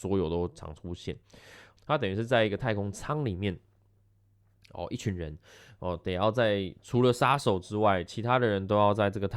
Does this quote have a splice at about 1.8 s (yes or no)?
yes